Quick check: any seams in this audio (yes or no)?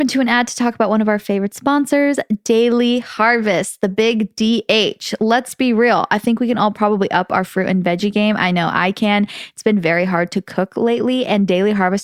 no